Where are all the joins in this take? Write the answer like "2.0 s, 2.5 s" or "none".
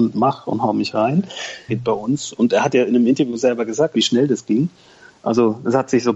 1.7 s, 3.9 s